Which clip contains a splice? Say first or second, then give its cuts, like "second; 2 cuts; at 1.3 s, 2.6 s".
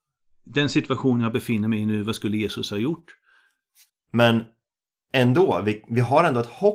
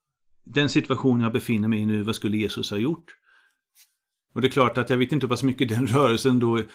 first; 1 cut; at 3.9 s